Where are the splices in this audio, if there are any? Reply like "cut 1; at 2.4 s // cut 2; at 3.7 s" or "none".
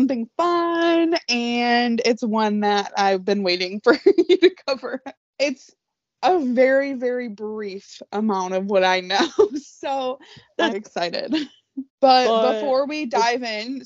cut 1; at 5.2 s // cut 2; at 10.7 s // cut 3; at 11.9 s